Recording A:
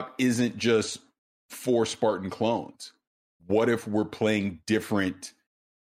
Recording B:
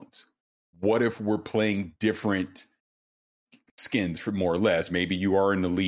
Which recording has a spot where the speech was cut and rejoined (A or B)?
B